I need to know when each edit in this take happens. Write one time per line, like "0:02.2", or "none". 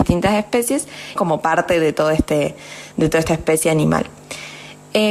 0:01.2